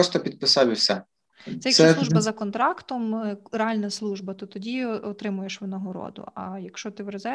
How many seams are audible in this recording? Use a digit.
1